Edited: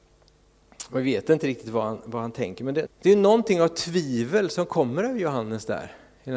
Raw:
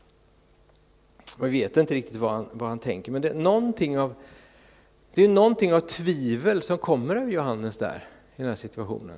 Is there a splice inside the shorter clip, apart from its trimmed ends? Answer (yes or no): yes